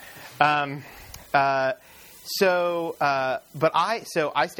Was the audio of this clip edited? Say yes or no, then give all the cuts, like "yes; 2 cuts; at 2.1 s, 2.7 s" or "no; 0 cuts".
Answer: no; 0 cuts